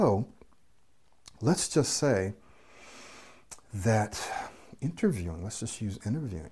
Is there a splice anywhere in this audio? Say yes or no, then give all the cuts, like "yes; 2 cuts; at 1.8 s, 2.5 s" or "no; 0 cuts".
no; 0 cuts